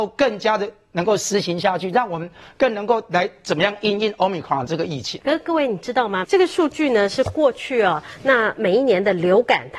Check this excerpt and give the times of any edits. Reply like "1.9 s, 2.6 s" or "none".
5.2 s, 6.2 s